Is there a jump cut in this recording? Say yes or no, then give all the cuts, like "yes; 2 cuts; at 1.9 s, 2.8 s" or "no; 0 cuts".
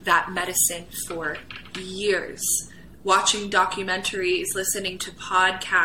no; 0 cuts